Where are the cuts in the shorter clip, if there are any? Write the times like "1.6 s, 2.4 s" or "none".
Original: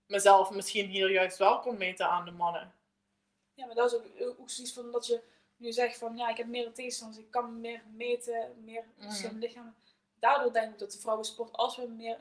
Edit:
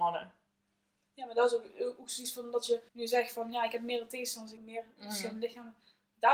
2.9 s, 4.6 s

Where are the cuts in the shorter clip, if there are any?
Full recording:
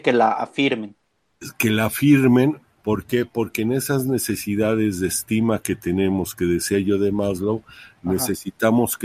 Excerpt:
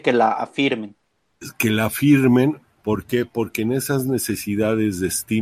none

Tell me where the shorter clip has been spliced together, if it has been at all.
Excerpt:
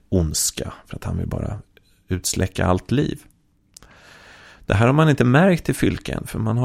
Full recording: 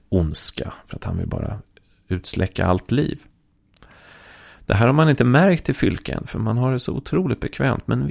none

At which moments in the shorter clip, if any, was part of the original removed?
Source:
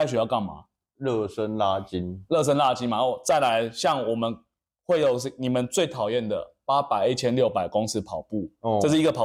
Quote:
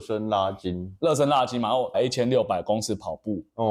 1.9 s

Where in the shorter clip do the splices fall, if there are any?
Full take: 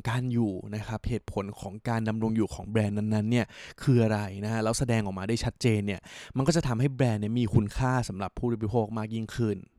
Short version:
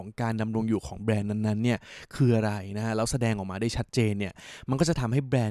none

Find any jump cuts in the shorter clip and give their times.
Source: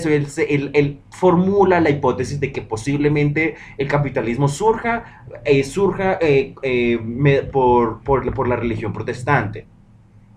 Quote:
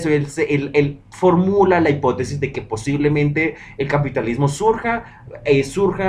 none

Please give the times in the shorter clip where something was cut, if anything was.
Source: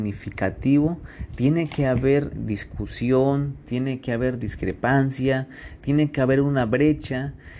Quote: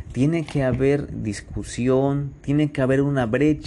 2.4 s

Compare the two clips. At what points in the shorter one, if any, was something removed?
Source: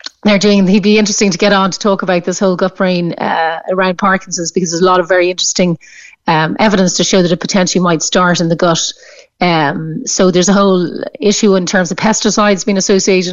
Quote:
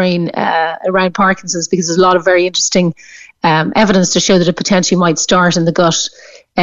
none

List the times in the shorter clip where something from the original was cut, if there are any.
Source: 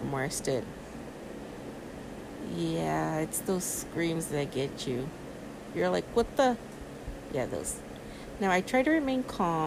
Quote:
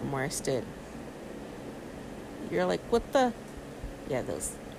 2.5 s

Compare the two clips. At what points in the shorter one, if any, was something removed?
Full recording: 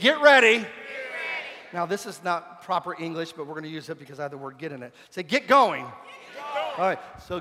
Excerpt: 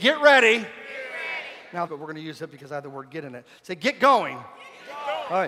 1.9 s

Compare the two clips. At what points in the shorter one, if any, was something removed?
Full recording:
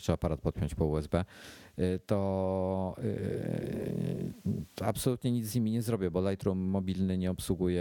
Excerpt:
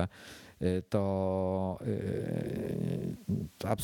none

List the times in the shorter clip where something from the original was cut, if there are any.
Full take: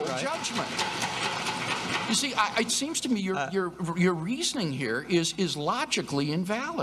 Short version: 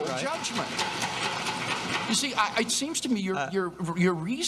none

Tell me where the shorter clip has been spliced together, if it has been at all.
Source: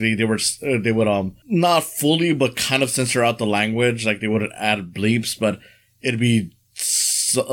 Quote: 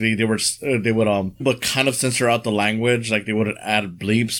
1.4 s

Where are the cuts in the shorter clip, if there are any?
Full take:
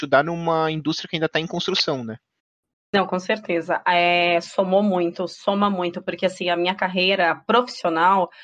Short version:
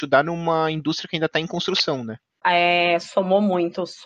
2.4 s

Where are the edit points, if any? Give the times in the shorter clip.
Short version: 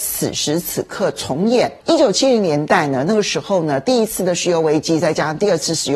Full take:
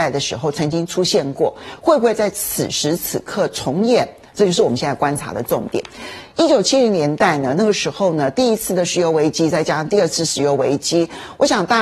1.8 s

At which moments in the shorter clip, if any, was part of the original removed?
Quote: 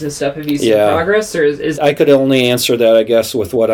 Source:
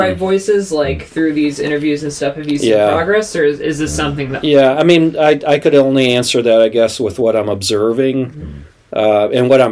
1.7 s

